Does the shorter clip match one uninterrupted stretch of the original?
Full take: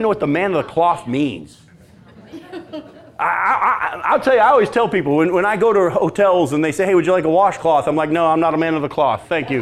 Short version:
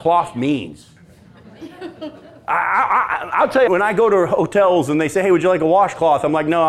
no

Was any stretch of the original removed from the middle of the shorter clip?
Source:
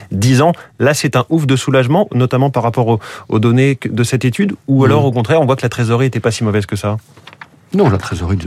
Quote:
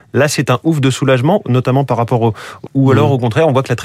yes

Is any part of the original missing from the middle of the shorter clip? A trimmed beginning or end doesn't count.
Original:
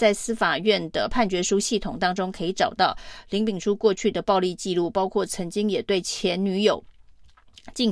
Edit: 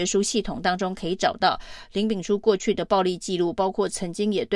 no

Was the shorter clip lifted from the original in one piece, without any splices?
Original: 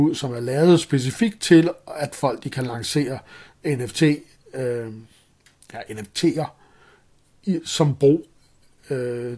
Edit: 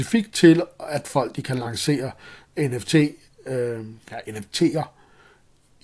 no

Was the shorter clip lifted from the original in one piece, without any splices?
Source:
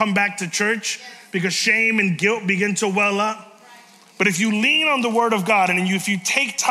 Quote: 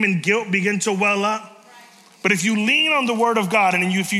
yes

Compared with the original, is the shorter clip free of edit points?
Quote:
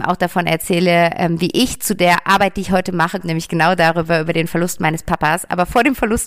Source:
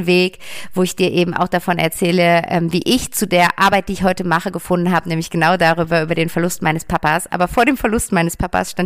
no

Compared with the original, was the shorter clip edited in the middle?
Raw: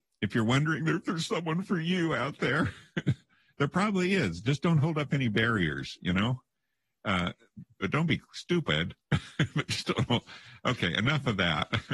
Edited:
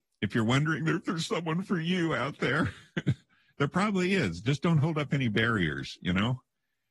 no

